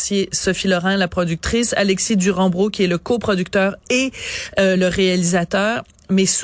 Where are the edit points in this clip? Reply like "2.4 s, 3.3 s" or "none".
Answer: none